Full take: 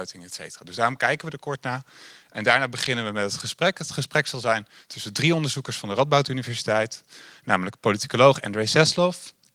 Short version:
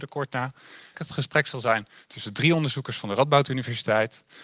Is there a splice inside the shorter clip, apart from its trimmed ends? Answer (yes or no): yes